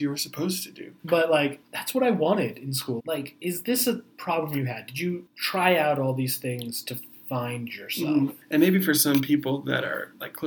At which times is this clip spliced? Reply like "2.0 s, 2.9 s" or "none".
1.0 s, 3.0 s